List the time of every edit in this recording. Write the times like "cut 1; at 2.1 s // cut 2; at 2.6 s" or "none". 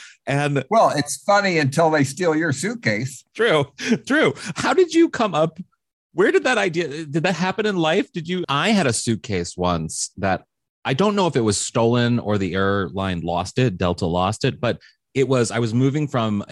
cut 1; at 3.3 s // cut 2; at 8.4 s